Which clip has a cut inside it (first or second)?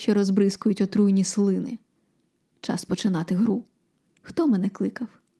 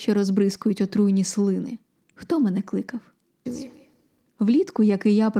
second